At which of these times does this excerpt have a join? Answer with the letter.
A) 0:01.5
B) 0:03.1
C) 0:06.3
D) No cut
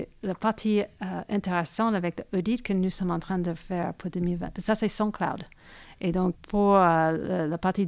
C